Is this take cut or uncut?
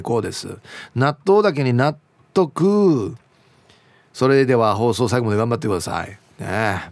uncut